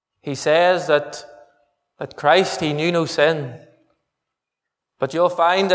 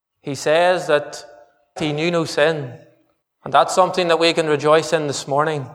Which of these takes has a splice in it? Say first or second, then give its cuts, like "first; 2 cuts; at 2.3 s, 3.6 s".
second; 2 cuts; at 1.8 s, 3.2 s